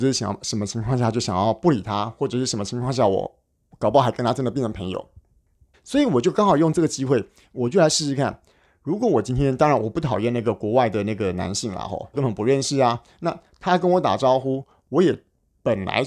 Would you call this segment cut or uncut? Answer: cut